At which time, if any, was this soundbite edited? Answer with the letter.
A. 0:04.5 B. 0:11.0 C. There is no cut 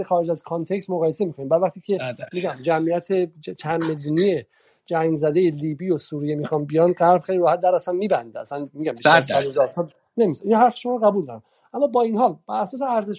C